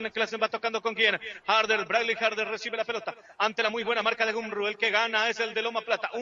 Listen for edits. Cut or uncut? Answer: uncut